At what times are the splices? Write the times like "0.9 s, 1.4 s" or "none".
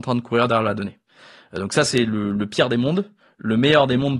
none